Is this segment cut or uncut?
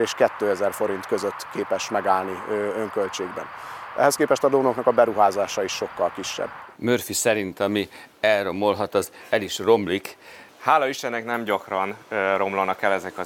cut